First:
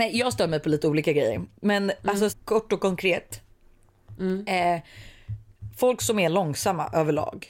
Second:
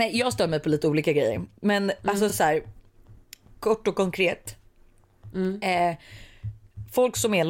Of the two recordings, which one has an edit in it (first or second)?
first